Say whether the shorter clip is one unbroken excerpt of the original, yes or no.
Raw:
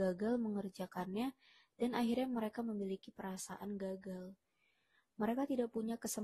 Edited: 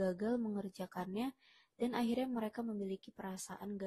yes